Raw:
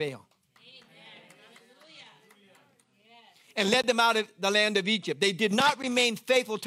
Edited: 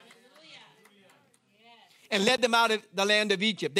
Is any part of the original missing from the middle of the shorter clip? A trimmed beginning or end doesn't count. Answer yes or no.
no